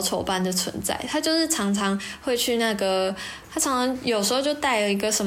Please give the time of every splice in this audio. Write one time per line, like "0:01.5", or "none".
0:03.5